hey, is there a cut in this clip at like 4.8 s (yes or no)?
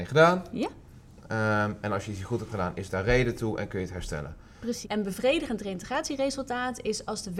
yes